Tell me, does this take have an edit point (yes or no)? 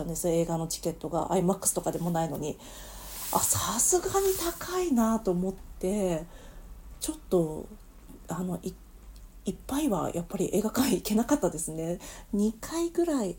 no